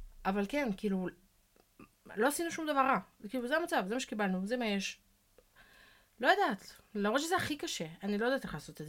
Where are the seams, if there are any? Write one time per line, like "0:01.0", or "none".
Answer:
none